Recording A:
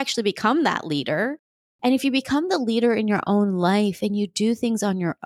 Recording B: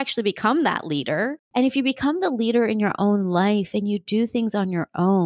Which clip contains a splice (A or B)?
B